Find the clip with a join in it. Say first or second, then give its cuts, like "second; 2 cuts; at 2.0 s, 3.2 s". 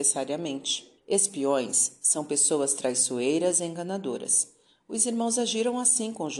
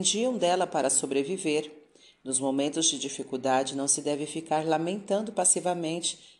first; 1 cut; at 1.0 s